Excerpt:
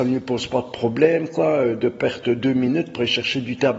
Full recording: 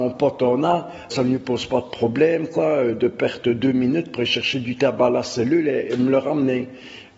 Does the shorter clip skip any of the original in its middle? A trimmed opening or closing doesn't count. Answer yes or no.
no